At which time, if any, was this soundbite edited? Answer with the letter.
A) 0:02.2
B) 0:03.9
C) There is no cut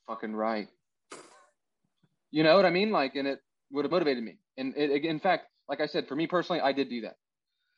B